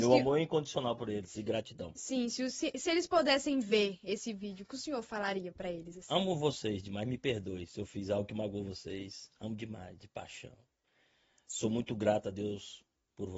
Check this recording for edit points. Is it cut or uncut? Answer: uncut